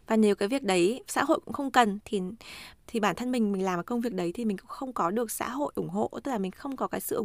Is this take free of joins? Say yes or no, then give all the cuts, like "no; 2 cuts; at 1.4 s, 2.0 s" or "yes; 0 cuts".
no; 1 cut; at 2.0 s